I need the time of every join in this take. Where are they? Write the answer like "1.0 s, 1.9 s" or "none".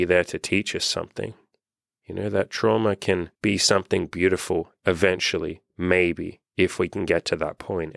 3.3 s